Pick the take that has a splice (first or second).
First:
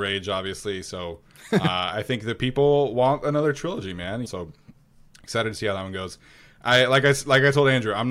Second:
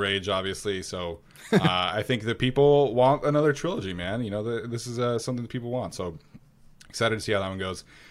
first